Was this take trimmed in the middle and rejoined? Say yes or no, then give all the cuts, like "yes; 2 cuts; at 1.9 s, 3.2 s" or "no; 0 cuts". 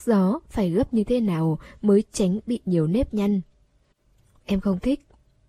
yes; 1 cut; at 4.4 s